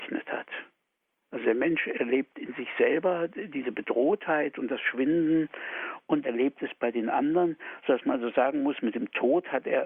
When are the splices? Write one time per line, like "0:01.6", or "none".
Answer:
0:06.2